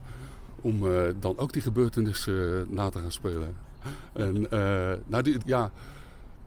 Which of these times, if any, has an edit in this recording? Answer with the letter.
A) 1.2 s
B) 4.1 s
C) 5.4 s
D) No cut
C